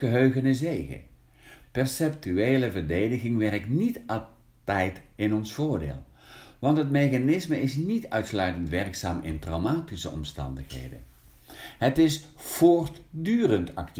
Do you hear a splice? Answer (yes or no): yes